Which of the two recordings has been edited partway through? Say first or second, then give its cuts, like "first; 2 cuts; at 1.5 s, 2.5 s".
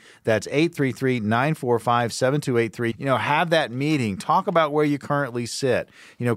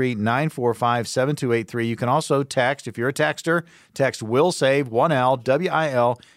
first; 1 cut; at 2.9 s